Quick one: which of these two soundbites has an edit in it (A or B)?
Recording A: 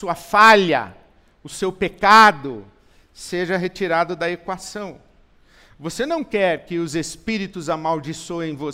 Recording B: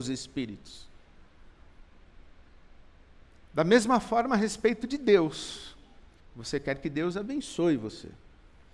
B